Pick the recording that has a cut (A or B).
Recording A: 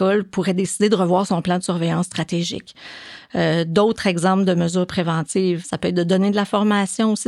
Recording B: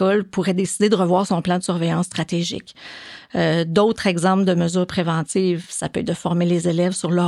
A